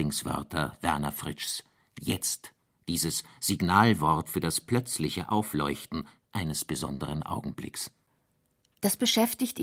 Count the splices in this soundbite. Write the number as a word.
zero